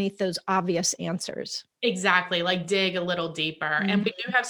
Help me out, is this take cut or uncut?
uncut